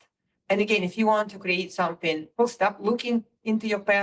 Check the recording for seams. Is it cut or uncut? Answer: cut